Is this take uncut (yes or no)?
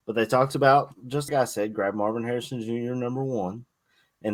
no